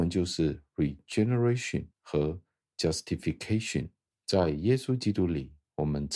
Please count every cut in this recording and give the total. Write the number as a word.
two